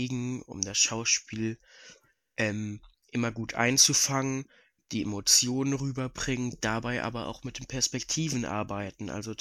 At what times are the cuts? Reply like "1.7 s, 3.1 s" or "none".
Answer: none